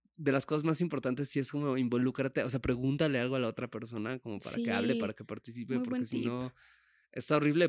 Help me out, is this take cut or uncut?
uncut